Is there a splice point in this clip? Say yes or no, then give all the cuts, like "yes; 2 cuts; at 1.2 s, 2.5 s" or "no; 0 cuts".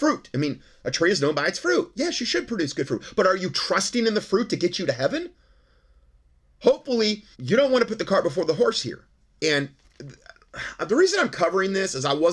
yes; 2 cuts; at 7.3 s, 9.4 s